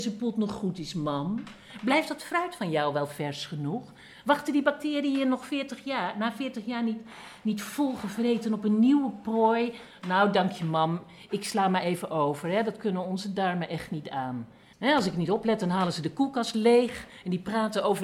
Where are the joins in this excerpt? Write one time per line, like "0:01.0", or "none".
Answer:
0:14.7